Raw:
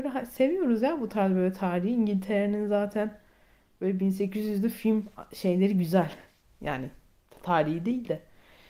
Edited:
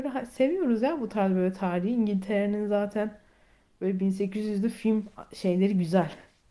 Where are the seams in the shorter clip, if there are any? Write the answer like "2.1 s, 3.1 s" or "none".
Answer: none